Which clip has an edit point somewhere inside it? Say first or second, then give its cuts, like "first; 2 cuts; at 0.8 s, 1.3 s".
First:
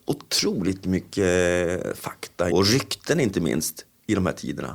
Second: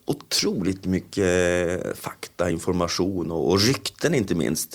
first; 1 cut; at 2.5 s